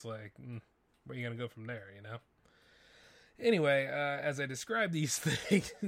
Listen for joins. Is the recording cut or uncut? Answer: uncut